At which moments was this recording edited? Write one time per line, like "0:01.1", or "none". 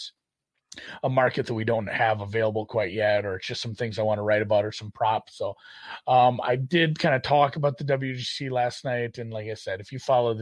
none